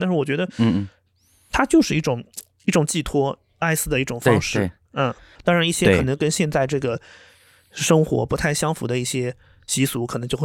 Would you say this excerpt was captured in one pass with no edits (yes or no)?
no